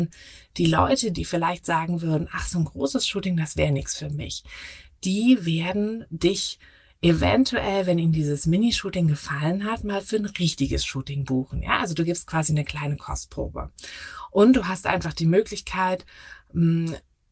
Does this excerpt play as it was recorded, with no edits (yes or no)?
no